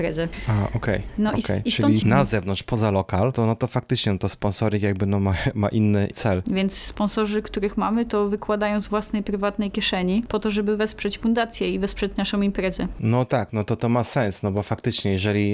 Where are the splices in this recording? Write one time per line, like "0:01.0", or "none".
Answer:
0:02.0
0:06.4